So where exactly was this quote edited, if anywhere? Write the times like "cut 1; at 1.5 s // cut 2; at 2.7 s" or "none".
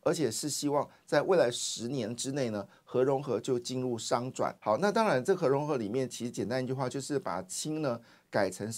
cut 1; at 4.6 s